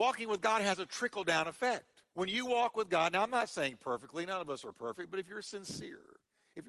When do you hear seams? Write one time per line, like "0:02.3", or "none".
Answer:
0:02.1